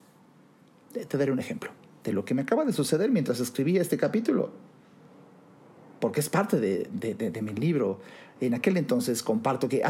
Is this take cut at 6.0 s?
no; 1 cut; at 8.4 s

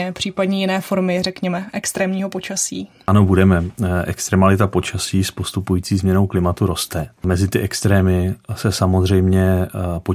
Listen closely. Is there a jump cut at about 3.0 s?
no; 0 cuts

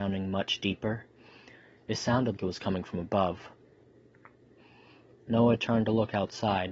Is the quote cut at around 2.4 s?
yes; 1 cut; at 2.4 s

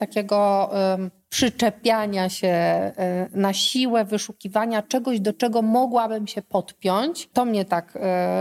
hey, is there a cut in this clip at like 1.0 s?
no; 0 cuts

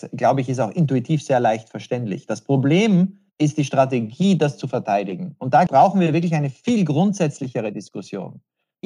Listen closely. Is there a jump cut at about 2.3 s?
no; 1 cut; at 5.7 s

